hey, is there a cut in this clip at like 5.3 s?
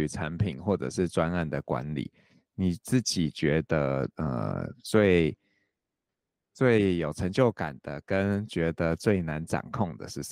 no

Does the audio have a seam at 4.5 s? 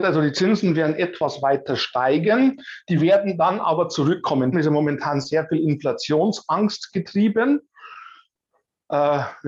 yes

